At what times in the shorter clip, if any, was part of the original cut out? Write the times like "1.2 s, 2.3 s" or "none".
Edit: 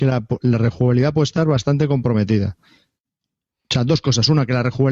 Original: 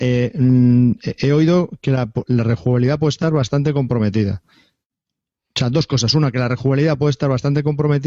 none